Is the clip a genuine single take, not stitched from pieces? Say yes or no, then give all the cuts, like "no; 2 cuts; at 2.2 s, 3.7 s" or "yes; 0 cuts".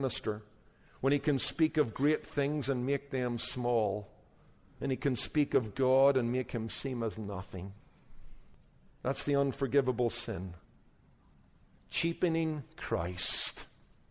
yes; 0 cuts